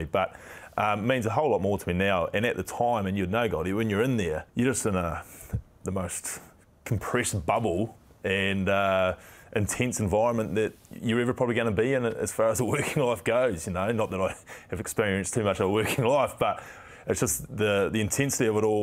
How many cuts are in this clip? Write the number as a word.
one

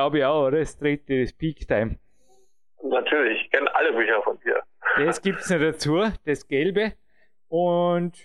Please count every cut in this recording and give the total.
zero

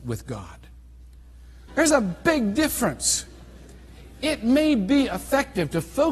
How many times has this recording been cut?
one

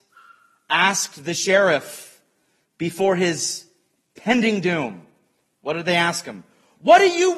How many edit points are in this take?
zero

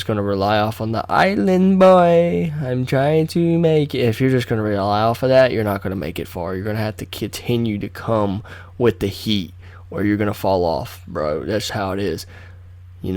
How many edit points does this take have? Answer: one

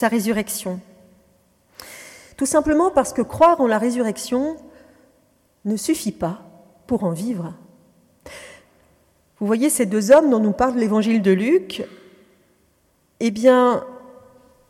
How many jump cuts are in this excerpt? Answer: one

